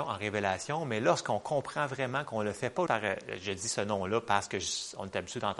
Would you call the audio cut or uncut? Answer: cut